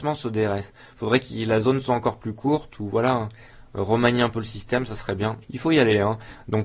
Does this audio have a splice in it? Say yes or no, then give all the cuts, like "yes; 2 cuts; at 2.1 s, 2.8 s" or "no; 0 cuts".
yes; 1 cut; at 5.4 s